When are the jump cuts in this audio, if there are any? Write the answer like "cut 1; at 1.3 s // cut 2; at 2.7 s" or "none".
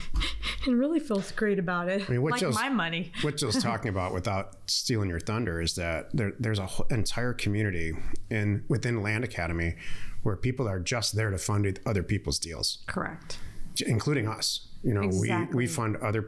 none